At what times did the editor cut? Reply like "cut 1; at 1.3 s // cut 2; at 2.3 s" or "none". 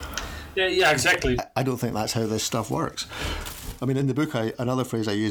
cut 1; at 1.4 s // cut 2; at 4.0 s